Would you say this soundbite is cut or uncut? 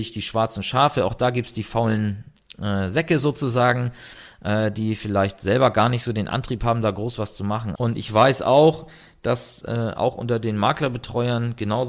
cut